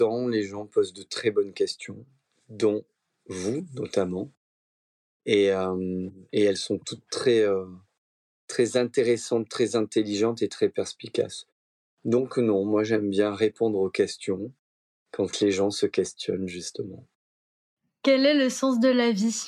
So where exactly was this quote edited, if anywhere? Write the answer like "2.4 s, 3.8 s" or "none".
none